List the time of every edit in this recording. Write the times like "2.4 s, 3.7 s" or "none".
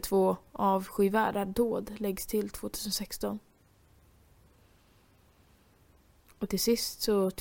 none

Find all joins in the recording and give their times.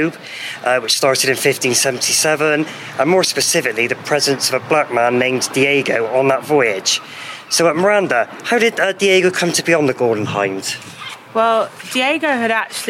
none

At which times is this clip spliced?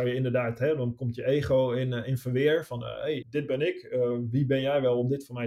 3.2 s

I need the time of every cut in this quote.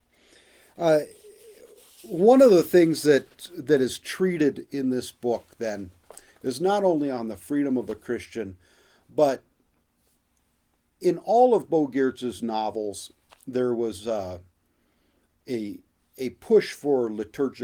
none

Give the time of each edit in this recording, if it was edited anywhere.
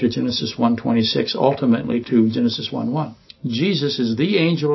2.0 s, 3.3 s

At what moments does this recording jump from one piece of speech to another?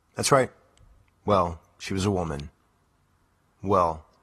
1.0 s

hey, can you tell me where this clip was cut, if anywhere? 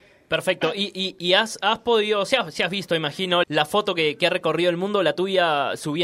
3.4 s

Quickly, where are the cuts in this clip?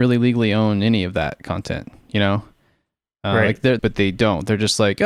3.8 s

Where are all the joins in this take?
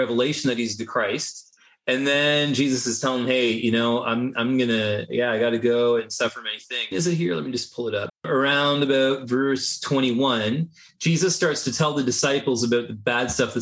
6.9 s, 8.1 s

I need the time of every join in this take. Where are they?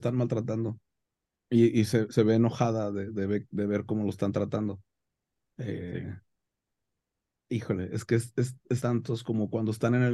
8.8 s

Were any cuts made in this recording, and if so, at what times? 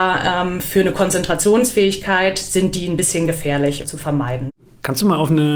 3.8 s

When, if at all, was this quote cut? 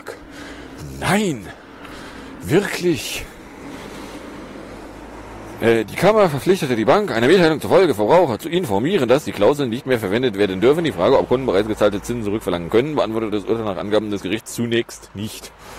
none

